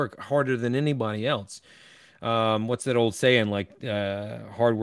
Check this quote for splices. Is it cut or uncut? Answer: uncut